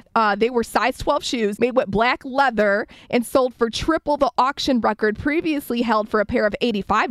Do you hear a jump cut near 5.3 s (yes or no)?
no